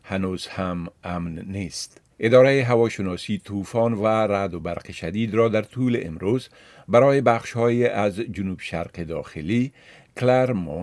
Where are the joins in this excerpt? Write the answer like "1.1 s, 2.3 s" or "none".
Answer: 2.1 s